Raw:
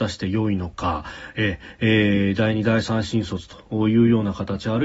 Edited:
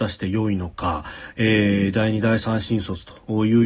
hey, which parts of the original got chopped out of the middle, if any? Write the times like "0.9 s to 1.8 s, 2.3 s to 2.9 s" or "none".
1.3 s to 1.7 s